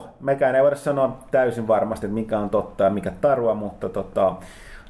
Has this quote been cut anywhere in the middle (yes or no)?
no